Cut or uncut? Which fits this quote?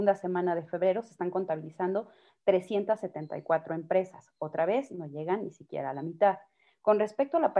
uncut